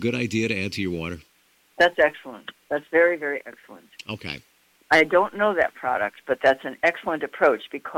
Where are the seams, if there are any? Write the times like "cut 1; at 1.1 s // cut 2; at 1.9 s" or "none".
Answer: none